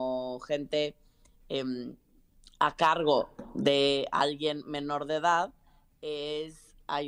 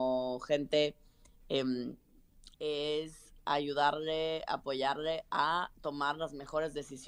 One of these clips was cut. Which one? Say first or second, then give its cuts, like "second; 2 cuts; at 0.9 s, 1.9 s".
second; 2 cuts; at 2.5 s, 5.7 s